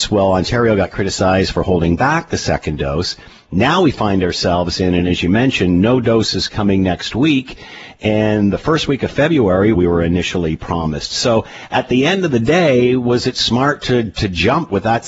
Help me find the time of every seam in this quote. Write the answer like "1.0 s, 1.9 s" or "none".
9.7 s